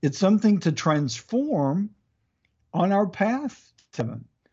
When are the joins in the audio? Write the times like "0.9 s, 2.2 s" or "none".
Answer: none